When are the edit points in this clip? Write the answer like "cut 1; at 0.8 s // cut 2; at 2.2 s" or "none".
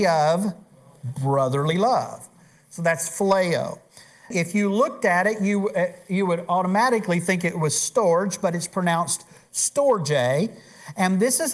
cut 1; at 4.3 s